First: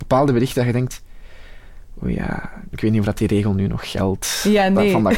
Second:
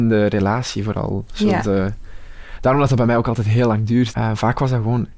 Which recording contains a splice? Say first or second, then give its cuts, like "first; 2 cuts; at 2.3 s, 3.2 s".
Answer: second; 1 cut; at 4.1 s